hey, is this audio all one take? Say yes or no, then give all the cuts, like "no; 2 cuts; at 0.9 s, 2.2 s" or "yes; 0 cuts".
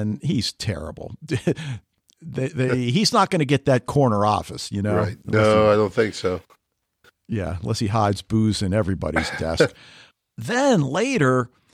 yes; 0 cuts